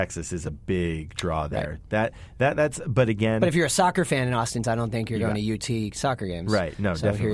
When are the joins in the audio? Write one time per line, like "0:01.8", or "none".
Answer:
0:04.6